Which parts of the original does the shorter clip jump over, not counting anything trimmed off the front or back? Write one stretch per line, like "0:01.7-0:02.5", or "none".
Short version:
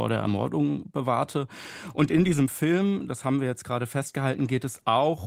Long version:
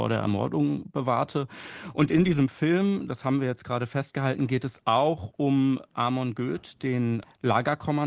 none